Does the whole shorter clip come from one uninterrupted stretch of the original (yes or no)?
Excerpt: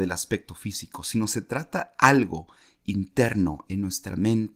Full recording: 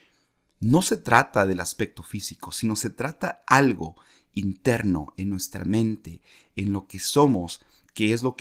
yes